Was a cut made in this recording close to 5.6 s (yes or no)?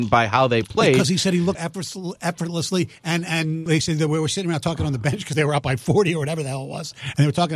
no